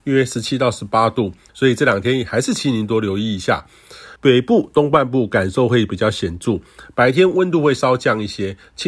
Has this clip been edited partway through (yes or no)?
yes